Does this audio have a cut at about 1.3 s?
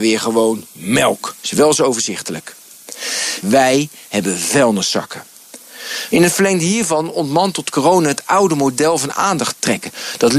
no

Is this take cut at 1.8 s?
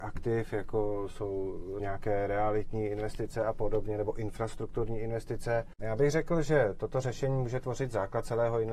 yes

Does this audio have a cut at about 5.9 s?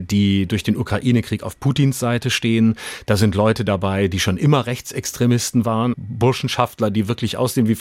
yes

